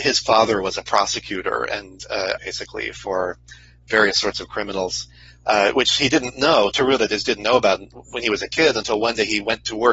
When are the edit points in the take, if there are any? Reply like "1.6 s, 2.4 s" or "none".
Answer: 2.4 s